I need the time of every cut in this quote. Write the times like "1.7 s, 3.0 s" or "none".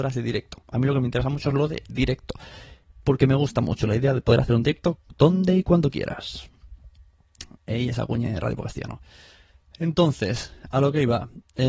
none